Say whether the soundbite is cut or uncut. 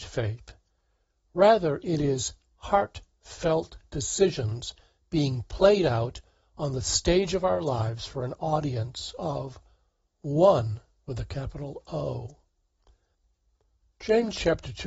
uncut